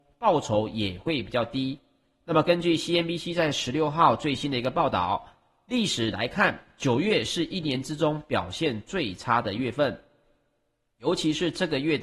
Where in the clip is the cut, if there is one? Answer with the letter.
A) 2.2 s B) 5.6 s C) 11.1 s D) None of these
D